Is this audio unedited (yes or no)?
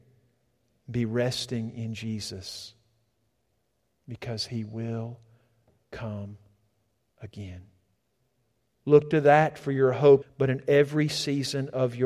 no